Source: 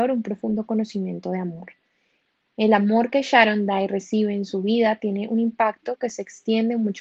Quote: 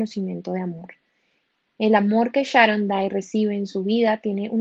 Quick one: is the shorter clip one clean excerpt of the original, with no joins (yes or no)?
yes